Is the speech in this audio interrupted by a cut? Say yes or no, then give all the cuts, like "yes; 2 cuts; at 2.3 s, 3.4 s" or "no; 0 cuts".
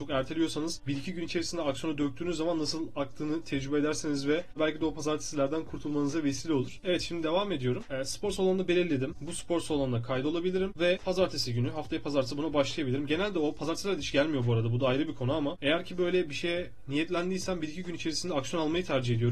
yes; 1 cut; at 9.1 s